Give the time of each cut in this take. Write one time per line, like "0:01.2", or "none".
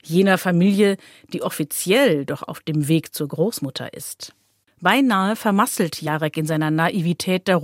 0:04.7